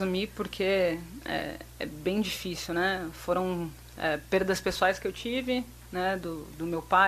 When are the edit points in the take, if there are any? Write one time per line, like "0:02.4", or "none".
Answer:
none